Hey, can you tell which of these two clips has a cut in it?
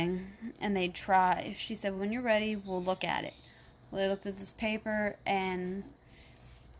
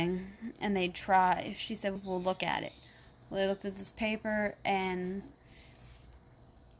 second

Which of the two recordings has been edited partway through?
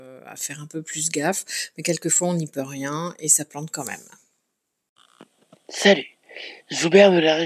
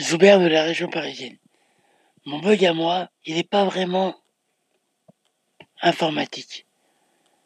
second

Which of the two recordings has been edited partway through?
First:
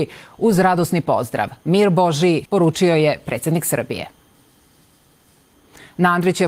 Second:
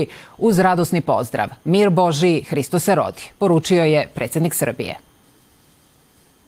first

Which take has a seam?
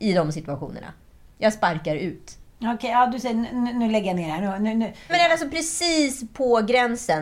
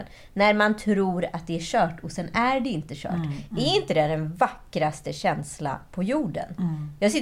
first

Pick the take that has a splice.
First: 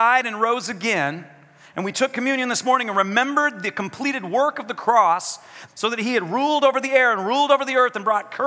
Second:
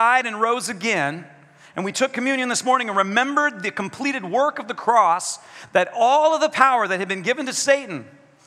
first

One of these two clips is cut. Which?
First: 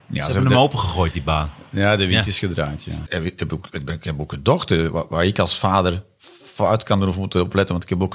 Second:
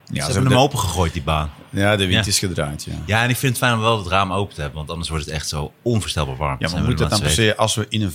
first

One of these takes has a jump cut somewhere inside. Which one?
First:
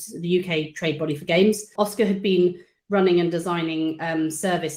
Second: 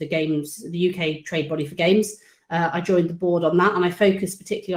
first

